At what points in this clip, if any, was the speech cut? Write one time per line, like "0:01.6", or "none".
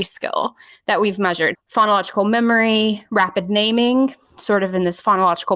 0:01.5